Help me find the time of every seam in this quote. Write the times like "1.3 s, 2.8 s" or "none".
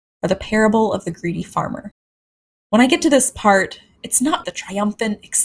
2.6 s, 4.4 s